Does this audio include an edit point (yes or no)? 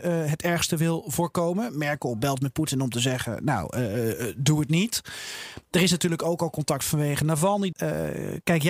yes